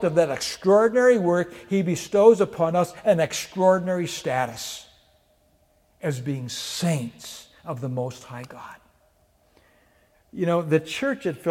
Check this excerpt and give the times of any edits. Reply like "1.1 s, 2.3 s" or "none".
10.1 s